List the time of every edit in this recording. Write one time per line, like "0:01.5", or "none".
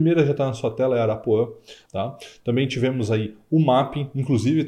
0:01.9